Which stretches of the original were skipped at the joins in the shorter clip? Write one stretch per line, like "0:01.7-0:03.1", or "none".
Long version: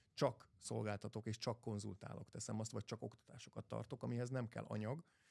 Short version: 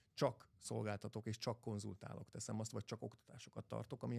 none